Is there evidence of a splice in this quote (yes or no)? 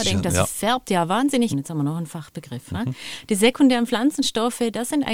yes